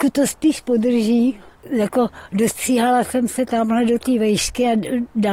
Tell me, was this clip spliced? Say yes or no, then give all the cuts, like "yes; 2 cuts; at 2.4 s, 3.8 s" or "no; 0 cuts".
yes; 1 cut; at 1.5 s